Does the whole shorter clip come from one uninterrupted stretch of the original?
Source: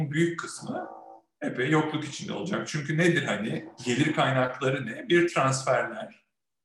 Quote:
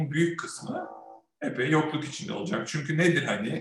yes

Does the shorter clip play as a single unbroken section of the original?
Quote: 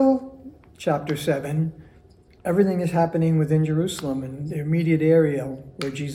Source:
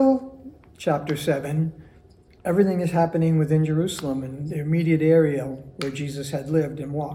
yes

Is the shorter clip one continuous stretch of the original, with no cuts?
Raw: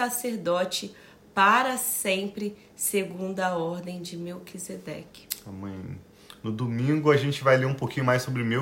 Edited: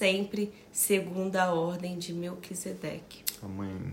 yes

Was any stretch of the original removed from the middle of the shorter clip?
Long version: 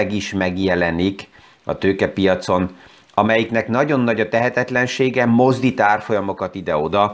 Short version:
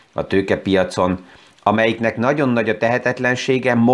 no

